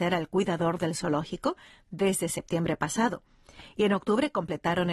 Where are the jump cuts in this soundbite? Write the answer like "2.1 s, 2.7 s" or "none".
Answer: none